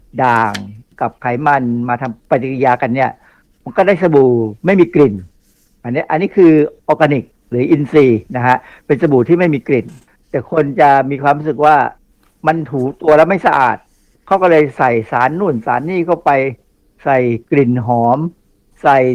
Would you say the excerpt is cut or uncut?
uncut